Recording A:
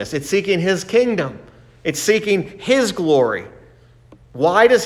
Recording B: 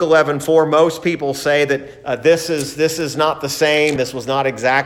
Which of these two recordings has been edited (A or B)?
B